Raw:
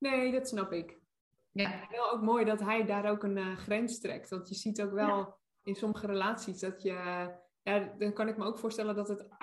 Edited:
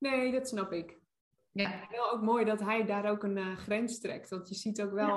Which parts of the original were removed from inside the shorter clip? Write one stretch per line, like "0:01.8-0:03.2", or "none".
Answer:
none